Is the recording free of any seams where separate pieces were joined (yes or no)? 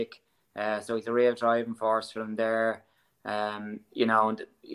yes